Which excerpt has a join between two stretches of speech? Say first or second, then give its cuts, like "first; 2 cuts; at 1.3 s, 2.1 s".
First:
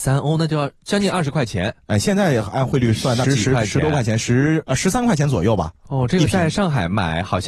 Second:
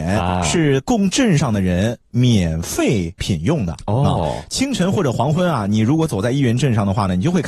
first; 1 cut; at 3.2 s